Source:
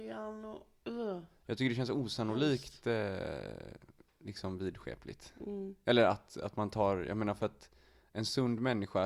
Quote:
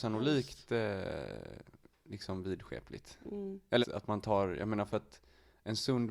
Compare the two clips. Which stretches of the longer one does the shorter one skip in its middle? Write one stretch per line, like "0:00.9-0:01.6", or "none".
0:06.0-0:06.3